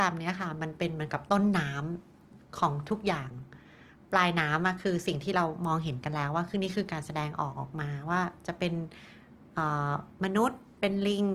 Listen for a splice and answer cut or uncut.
uncut